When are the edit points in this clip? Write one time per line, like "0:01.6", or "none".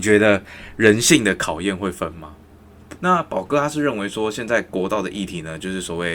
0:03.0